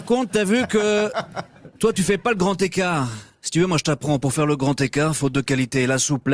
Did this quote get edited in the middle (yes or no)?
no